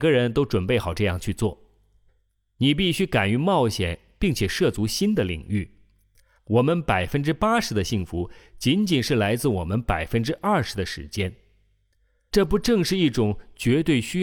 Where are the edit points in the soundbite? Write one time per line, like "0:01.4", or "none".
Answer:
0:06.4